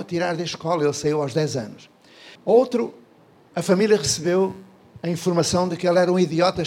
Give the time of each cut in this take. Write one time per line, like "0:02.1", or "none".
0:02.4

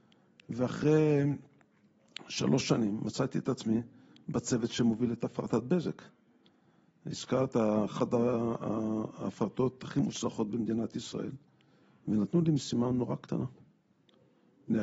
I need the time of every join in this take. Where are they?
none

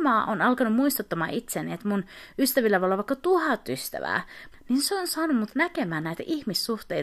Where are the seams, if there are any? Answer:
0:04.5

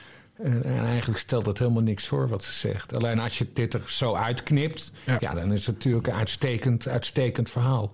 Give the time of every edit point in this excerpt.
none

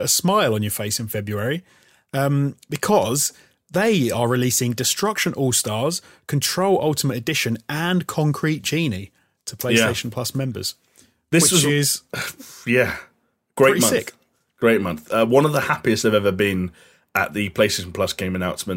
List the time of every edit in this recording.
none

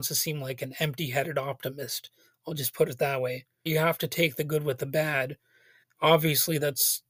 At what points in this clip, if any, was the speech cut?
0:03.7
0:05.8

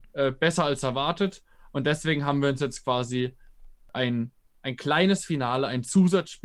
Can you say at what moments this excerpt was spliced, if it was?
none

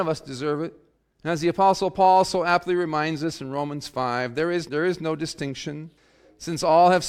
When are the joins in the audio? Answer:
0:04.7

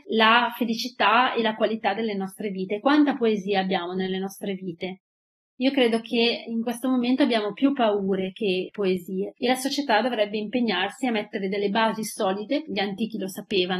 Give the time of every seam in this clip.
none

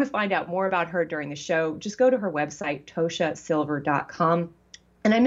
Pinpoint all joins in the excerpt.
none

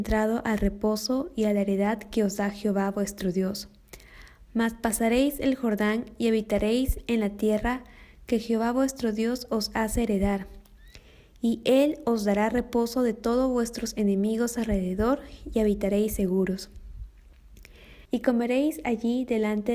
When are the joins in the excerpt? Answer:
0:18.0

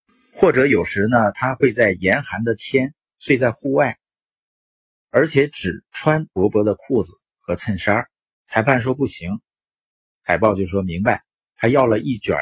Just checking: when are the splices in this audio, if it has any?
0:08.3

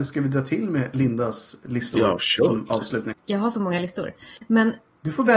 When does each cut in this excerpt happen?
0:03.1

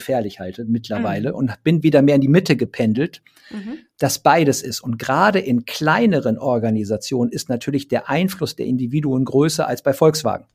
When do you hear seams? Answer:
none

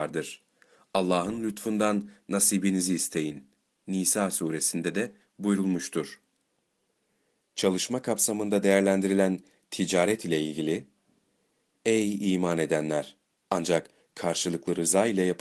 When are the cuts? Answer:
0:13.5

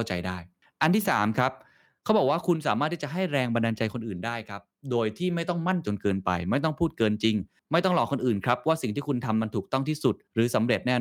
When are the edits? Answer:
0:05.8

